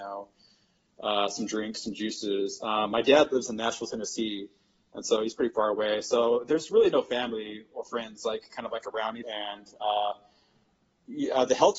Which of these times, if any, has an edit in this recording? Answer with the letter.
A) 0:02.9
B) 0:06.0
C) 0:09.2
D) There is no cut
C